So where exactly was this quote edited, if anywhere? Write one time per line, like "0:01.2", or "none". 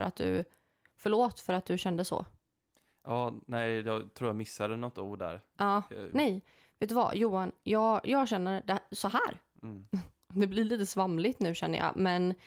0:06.1